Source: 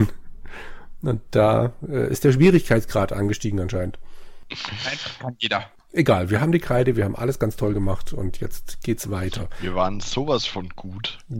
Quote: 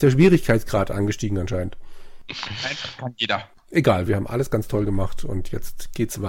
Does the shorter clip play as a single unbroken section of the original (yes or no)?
no